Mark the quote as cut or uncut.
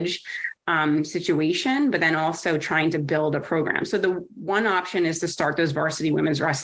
uncut